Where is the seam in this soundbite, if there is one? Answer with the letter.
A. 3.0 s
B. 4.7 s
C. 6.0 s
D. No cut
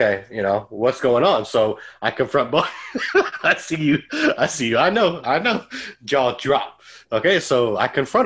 D